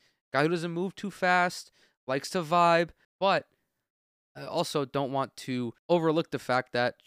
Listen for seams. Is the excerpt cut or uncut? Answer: cut